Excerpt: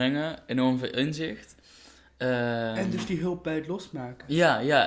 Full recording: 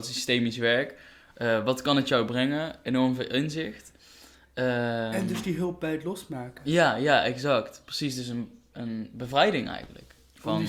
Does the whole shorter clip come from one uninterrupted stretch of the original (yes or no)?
yes